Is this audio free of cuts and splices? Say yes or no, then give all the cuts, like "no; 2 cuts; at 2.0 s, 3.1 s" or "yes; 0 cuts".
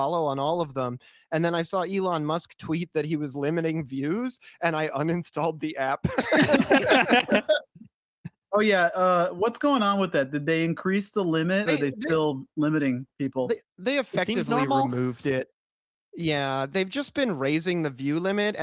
no; 1 cut; at 11.7 s